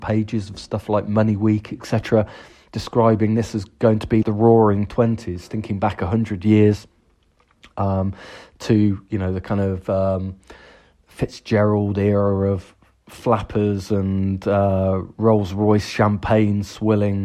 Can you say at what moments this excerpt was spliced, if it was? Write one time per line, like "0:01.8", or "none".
0:04.2